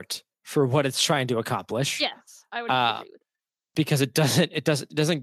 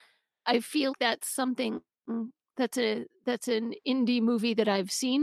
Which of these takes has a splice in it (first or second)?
second